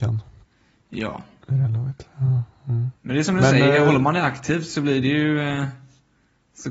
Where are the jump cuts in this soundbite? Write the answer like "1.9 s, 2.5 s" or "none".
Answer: 3.0 s